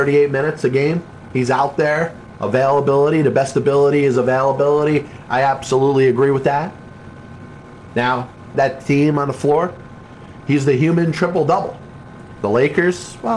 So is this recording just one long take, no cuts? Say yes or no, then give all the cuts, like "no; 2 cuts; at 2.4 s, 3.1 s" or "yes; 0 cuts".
no; 3 cuts; at 8.5 s, 10.4 s, 12.4 s